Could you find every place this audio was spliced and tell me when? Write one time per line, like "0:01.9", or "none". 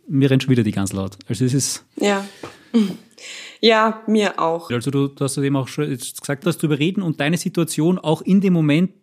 0:04.7
0:06.4